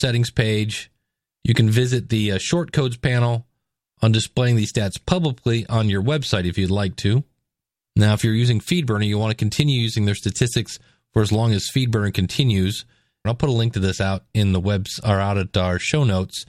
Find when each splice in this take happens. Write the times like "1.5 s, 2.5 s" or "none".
7.9 s, 13.2 s